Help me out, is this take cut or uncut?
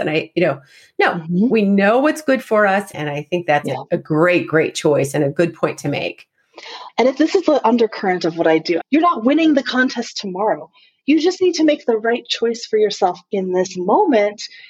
cut